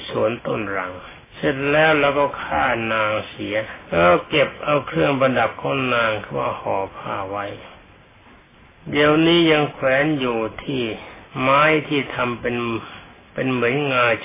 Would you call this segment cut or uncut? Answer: cut